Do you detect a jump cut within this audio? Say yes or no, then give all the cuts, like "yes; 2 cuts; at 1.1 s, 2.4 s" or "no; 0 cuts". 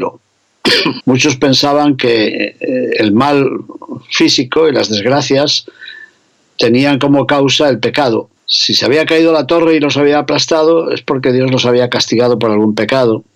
yes; 2 cuts; at 1.0 s, 8.4 s